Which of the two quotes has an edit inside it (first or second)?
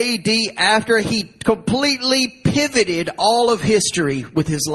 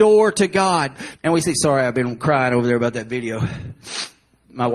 second